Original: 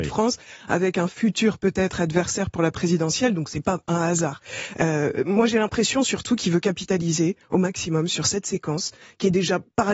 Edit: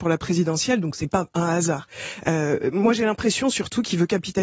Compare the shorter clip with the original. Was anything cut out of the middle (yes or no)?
no